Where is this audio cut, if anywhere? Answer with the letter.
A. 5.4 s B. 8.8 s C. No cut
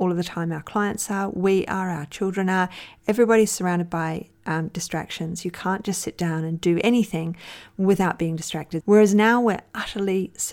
B